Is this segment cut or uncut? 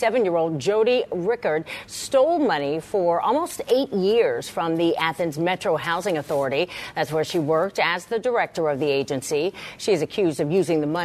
uncut